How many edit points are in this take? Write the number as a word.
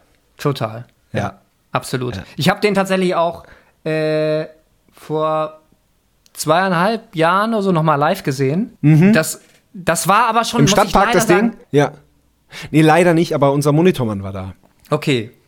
two